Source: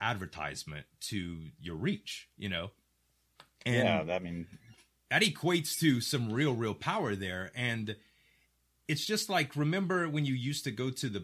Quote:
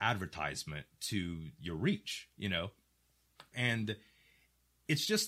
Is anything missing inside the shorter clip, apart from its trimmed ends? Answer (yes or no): yes